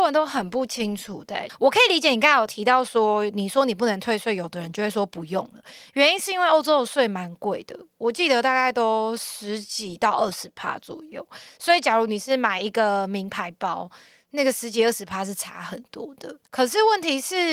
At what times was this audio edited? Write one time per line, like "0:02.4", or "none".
0:16.5